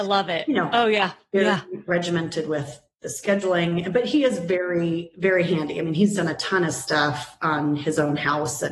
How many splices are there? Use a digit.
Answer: 0